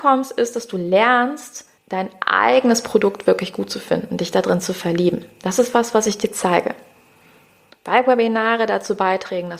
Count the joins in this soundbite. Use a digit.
2